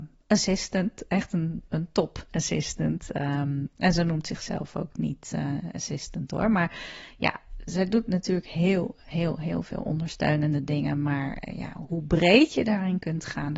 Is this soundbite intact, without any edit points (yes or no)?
yes